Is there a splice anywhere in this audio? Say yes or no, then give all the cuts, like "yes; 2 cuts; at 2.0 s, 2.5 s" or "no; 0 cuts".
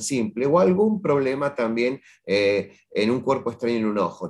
no; 0 cuts